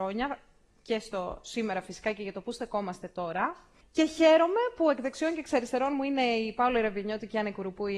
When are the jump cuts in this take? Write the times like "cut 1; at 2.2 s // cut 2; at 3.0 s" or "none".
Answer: cut 1; at 3.8 s